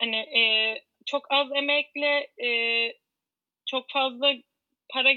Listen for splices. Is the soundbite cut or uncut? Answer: uncut